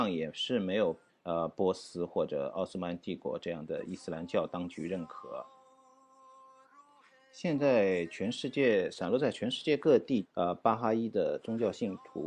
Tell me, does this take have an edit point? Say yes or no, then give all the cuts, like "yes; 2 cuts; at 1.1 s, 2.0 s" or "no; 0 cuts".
yes; 2 cuts; at 1.1 s, 10.2 s